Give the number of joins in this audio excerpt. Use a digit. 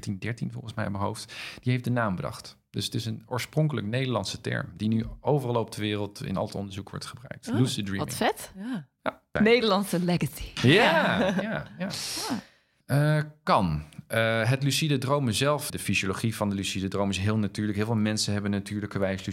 3